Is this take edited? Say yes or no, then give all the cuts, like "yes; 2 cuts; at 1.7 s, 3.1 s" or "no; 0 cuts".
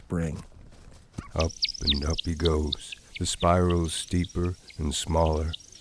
yes; 1 cut; at 1.3 s